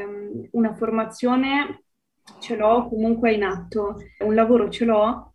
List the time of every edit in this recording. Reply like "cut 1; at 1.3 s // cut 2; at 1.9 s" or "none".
cut 1; at 4.2 s